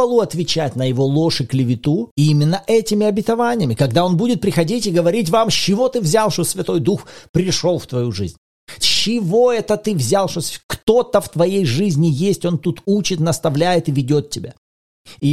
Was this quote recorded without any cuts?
no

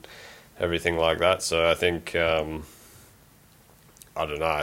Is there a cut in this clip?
no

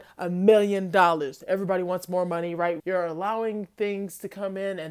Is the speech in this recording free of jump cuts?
no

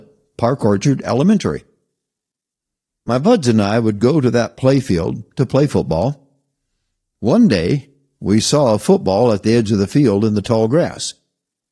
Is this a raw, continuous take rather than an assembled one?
yes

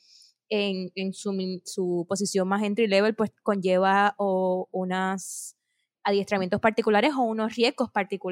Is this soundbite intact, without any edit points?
no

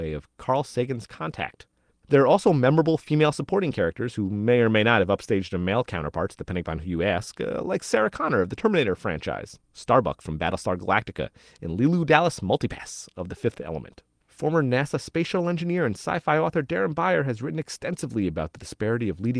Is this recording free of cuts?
yes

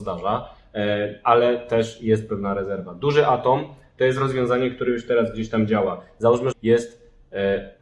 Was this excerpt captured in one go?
no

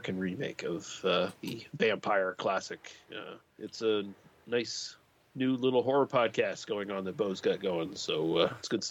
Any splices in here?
yes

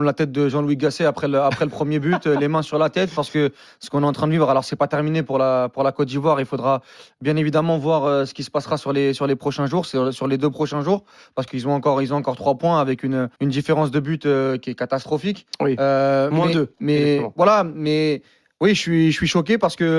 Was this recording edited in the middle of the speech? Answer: yes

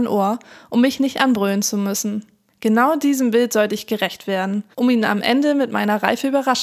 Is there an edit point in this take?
yes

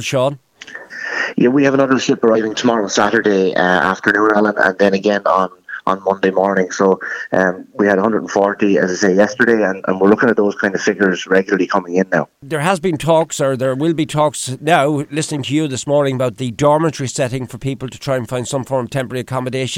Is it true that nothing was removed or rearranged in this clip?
yes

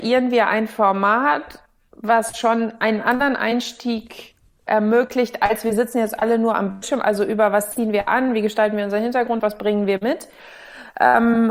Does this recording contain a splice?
yes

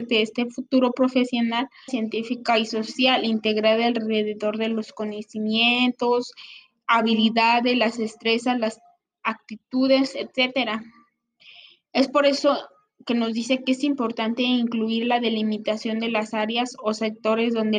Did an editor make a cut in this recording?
yes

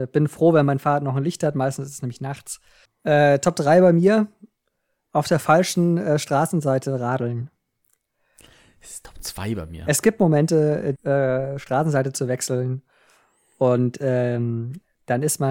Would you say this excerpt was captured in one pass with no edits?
no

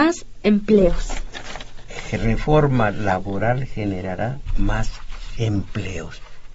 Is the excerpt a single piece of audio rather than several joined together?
yes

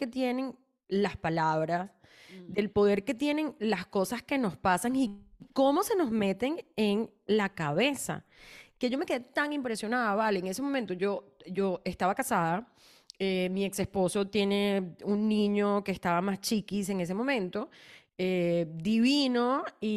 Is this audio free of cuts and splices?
yes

